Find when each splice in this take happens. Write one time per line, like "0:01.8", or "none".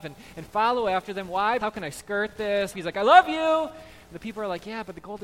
0:01.6
0:02.7